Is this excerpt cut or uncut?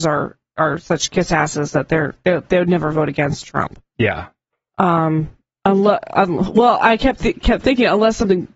uncut